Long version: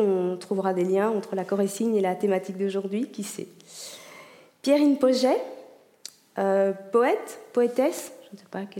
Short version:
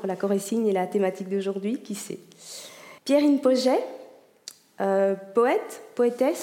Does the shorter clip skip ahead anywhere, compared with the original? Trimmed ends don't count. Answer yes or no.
yes